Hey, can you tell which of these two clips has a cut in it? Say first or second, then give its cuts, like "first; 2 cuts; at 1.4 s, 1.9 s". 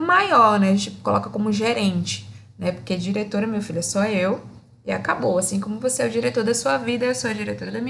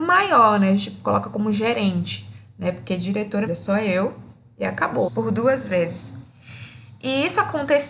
second; 2 cuts; at 3.5 s, 5.1 s